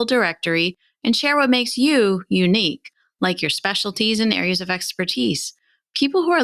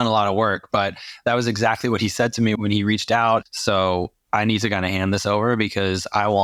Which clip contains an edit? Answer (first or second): second